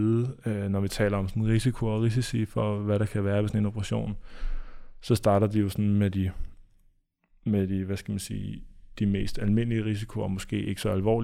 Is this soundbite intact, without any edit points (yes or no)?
yes